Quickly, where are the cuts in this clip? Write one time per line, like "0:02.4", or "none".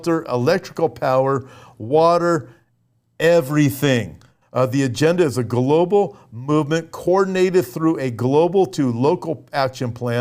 0:04.4